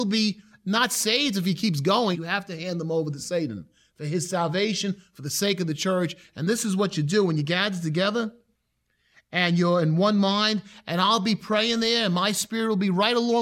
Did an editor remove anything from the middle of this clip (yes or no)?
yes